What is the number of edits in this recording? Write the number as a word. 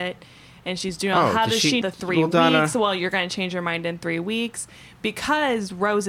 one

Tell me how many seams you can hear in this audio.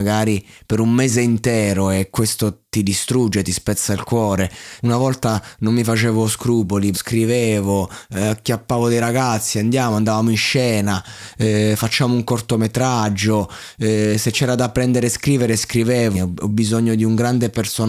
three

